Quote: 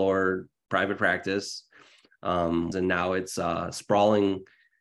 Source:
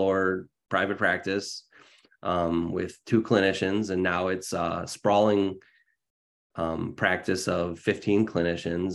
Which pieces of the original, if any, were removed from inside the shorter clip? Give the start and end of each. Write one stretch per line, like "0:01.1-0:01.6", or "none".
0:02.7-0:03.9